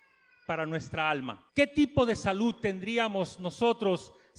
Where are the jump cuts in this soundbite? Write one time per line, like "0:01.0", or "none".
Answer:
0:01.5